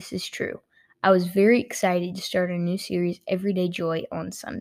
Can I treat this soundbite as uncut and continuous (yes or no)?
yes